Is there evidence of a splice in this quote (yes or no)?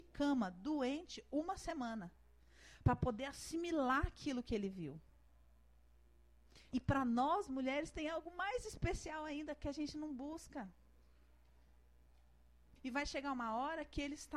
yes